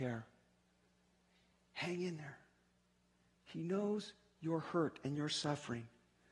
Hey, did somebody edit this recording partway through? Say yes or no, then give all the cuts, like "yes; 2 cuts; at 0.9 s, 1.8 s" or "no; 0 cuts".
yes; 1 cut; at 3.3 s